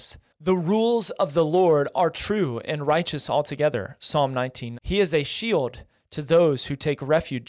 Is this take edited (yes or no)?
yes